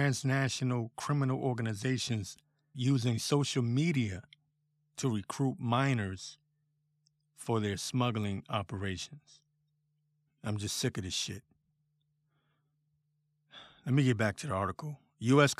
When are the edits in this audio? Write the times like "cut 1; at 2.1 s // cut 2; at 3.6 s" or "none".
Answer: cut 1; at 2.7 s // cut 2; at 10.3 s